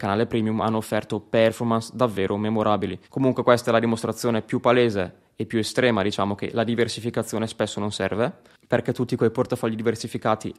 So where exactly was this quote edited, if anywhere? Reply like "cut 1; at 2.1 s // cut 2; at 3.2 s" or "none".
cut 1; at 3.0 s